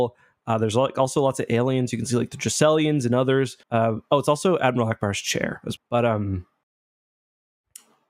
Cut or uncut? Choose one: cut